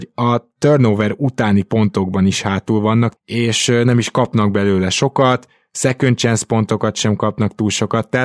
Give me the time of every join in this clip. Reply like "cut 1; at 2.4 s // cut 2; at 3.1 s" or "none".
cut 1; at 3.2 s

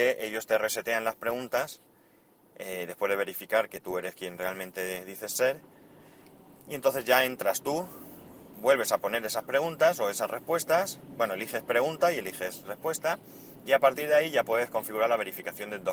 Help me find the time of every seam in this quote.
none

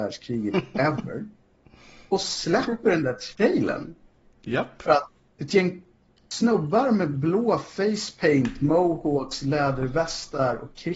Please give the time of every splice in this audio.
cut 1; at 4.2 s

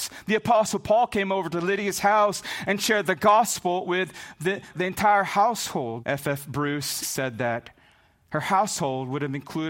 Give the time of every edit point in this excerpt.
cut 1; at 4.7 s // cut 2; at 6.0 s // cut 3; at 7.0 s

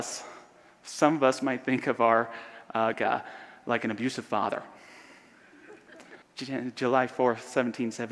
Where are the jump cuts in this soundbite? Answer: cut 1; at 2.9 s // cut 2; at 6.2 s

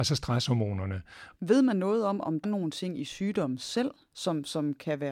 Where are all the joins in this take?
cut 1; at 1.4 s // cut 2; at 2.4 s

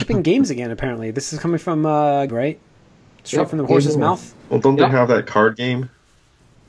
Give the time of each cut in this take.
cut 1; at 2.3 s

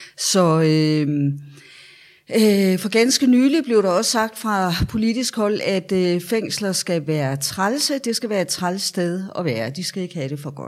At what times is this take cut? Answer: none

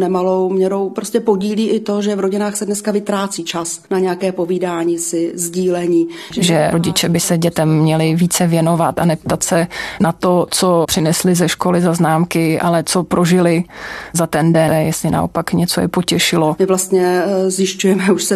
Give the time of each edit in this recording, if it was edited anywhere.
cut 1; at 6.3 s // cut 2; at 14.7 s

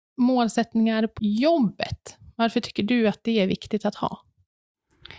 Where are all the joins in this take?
cut 1; at 1.2 s

